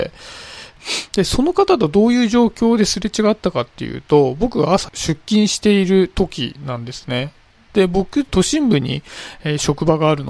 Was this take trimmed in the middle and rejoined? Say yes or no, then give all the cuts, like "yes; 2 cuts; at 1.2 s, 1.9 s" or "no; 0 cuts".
no; 0 cuts